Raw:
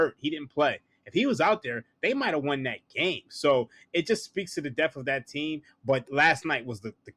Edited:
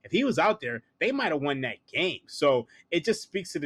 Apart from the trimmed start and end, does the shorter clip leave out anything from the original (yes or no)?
no